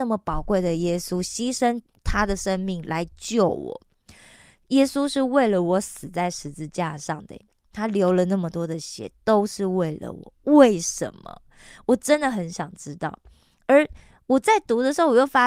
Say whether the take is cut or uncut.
uncut